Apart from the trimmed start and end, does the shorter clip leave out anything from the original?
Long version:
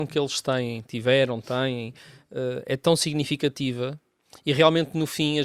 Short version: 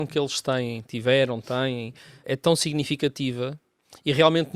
yes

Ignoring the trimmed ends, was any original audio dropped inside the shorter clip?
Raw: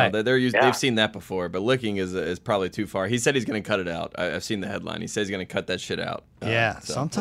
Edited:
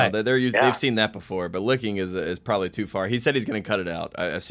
no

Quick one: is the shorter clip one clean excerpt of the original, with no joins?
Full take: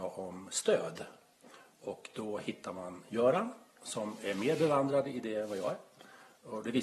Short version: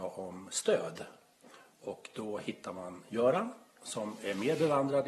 yes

